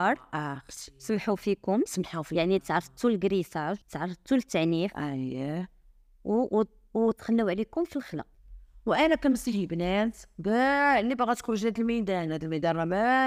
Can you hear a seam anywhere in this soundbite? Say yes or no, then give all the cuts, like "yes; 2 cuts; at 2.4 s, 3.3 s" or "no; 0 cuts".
yes; 1 cut; at 3.8 s